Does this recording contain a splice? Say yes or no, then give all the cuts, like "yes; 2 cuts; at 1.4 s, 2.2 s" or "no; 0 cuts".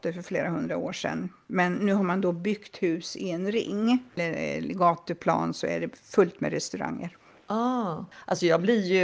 no; 0 cuts